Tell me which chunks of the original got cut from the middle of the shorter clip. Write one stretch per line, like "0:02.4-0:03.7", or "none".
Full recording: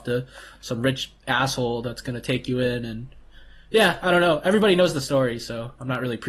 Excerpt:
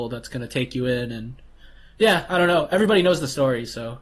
none

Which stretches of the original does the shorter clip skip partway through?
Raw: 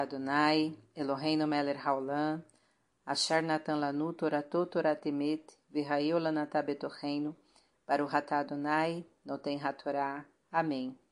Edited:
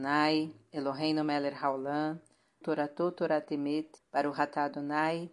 0:02.8-0:04.2
0:05.5-0:07.7

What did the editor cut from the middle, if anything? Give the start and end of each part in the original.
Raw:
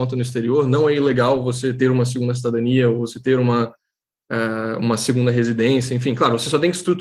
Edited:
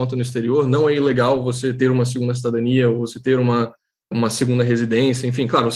0:04.1-0:04.8

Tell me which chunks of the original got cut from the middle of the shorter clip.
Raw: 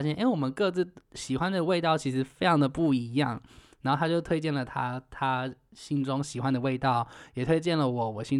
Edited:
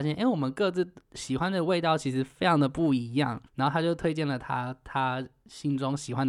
0:03.5-0:03.7

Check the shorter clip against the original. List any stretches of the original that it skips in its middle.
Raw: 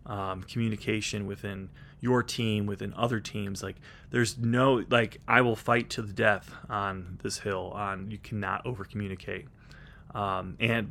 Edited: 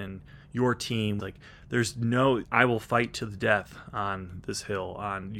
0:02.7-0:03.6
0:04.9-0:05.2

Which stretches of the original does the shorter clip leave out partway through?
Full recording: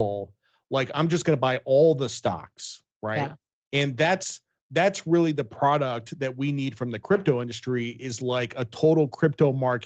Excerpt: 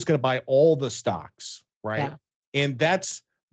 none

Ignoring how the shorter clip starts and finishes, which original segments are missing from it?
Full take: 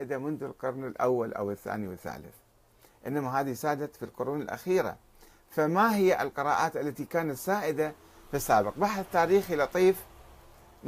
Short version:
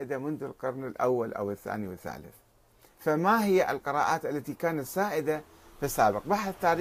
0:02.9-0:05.4

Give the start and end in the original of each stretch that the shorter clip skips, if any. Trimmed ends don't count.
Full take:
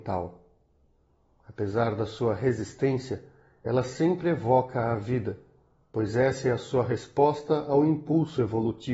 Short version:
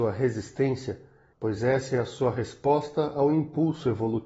0:03.6-0:05.9

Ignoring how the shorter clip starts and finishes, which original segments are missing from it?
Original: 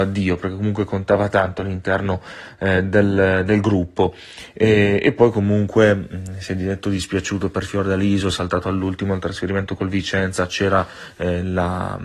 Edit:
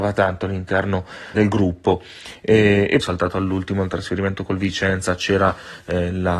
0:02.5-0:03.5
0:05.1-0:08.3

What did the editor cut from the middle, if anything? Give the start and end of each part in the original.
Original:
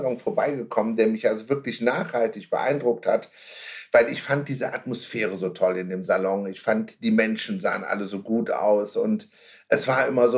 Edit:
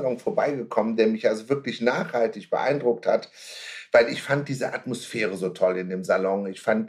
none

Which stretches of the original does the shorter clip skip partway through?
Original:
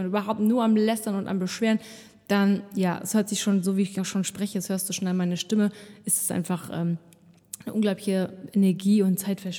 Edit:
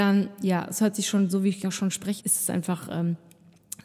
0:04.5-0:06.0

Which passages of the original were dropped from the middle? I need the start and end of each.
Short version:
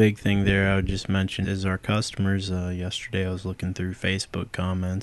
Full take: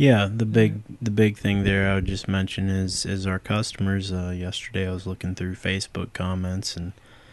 0:02.6-0:03.0

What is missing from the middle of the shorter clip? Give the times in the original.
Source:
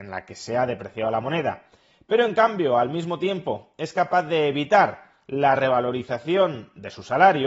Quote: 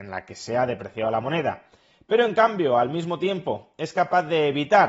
none

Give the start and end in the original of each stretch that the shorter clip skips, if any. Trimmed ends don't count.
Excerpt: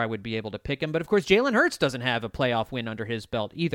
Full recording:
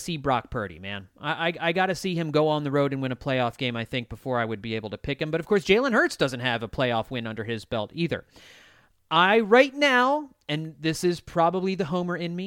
none

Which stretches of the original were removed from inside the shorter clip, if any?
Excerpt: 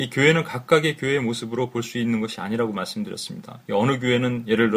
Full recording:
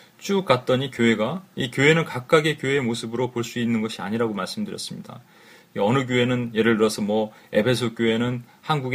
0:05.2-0:05.7

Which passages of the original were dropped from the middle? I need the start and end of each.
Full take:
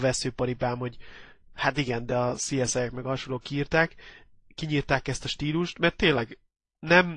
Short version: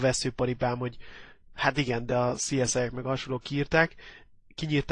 none

